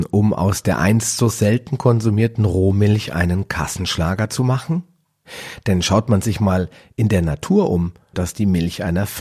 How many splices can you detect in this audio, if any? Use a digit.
1